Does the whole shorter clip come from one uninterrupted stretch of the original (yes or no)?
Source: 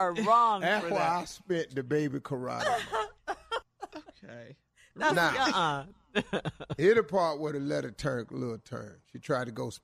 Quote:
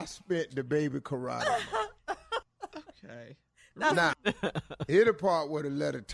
no